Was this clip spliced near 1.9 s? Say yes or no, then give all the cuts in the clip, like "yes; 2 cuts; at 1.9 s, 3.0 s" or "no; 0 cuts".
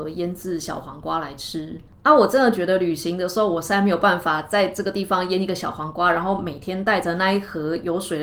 yes; 1 cut; at 1.9 s